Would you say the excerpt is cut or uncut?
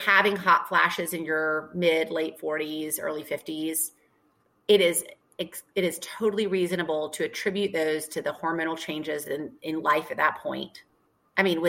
uncut